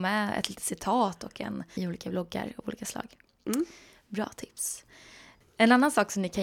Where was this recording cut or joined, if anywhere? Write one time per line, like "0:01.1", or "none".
0:01.8